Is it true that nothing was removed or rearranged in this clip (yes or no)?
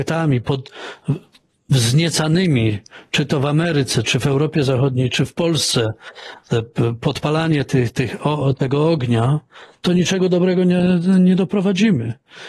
yes